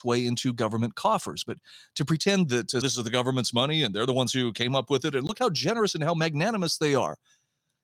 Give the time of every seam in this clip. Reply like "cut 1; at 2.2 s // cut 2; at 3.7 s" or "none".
cut 1; at 2.8 s